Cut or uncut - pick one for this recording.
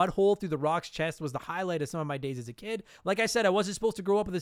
uncut